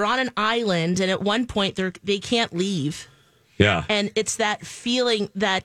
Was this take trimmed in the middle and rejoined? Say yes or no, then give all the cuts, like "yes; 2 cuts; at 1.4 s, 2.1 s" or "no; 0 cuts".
no; 0 cuts